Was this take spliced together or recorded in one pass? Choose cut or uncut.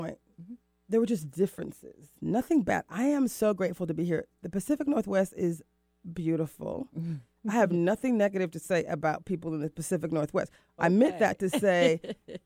uncut